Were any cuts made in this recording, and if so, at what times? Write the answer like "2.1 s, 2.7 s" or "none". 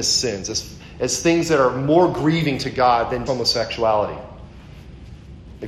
3.3 s